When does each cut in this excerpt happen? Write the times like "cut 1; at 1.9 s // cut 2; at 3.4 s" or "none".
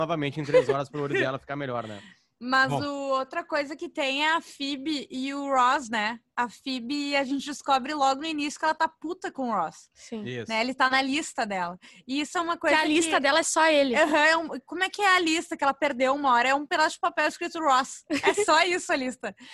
none